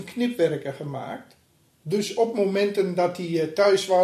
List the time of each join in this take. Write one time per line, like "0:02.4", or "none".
0:01.8